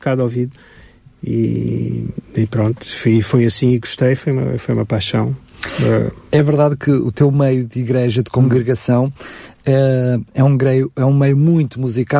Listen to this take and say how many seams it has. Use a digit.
0